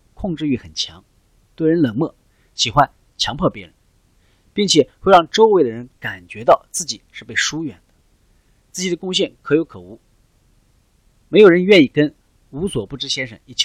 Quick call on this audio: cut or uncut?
uncut